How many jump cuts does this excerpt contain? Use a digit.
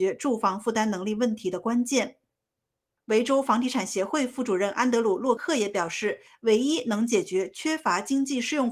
1